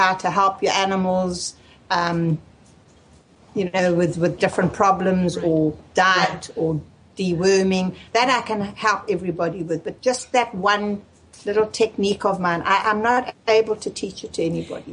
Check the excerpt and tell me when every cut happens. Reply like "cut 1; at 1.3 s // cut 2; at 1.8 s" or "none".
none